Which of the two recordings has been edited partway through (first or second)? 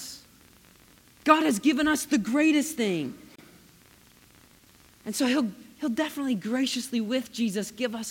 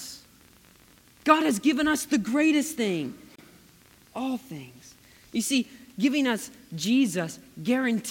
second